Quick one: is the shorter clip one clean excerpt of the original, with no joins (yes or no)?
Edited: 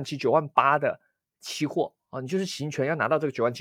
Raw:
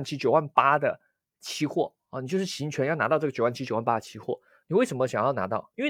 yes